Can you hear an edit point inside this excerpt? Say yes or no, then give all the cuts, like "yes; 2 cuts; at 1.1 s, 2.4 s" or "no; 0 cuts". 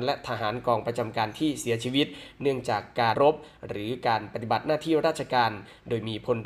yes; 1 cut; at 3.1 s